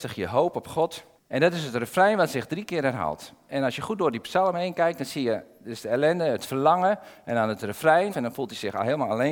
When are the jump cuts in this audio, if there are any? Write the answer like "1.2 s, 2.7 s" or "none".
1.2 s, 8.1 s